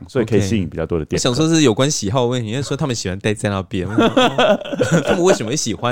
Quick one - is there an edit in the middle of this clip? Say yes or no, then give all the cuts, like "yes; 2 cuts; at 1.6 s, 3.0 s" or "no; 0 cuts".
no; 0 cuts